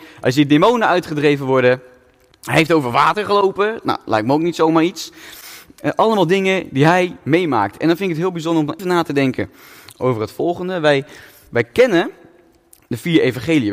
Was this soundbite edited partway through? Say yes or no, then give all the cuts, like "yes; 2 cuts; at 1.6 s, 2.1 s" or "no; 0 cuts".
yes; 1 cut; at 8.8 s